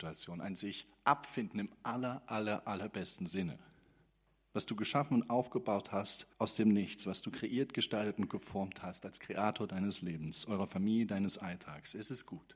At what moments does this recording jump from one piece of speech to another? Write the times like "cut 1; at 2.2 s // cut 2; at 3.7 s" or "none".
cut 1; at 6.3 s